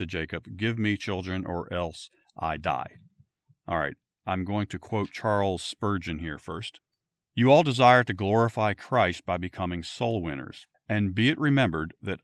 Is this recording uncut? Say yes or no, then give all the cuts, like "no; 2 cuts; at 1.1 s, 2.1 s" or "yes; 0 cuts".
no; 1 cut; at 10.7 s